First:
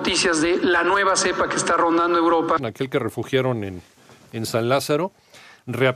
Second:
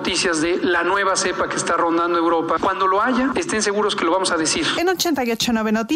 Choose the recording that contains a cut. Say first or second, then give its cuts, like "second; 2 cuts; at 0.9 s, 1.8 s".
first; 1 cut; at 2.6 s